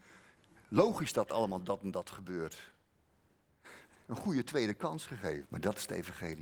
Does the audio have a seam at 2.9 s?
no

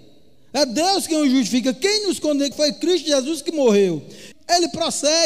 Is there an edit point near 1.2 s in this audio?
no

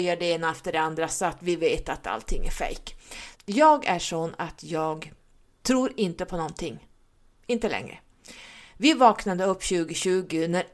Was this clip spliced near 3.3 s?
yes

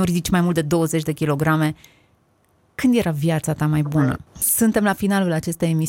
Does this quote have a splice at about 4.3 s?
yes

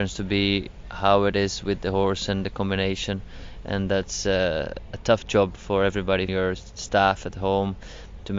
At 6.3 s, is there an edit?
yes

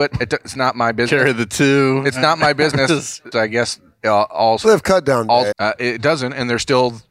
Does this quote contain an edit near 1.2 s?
no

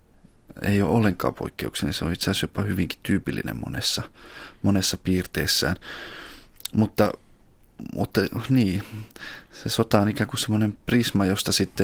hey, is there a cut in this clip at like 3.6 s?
no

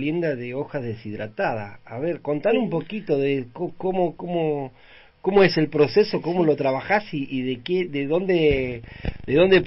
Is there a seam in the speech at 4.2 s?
yes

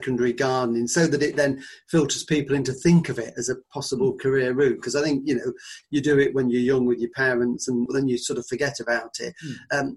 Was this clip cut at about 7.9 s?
yes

